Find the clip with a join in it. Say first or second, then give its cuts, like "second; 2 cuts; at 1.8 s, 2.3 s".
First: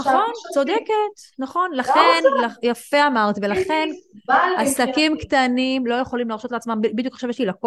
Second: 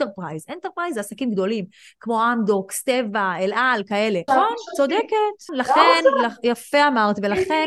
second; 2 cuts; at 4.3 s, 5.5 s